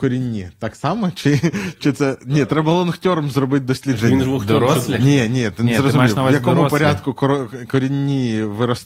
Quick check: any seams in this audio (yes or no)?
no